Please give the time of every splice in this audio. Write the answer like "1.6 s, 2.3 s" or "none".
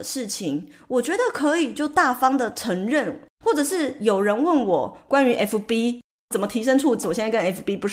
3.3 s, 7.0 s